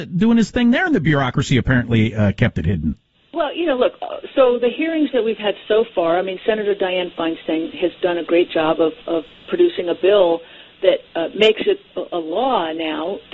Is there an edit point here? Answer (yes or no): no